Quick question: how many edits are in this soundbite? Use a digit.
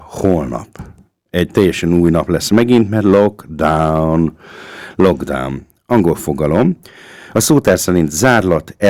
0